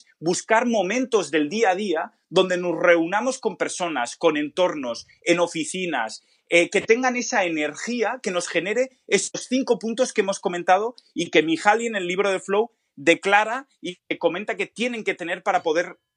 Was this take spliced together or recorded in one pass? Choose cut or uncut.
uncut